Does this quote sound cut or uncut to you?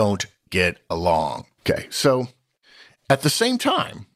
cut